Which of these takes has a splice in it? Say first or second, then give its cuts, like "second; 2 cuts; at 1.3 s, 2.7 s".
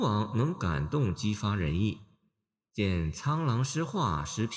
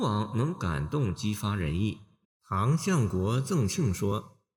second; 1 cut; at 2.2 s